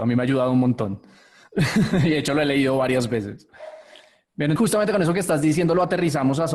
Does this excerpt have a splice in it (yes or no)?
yes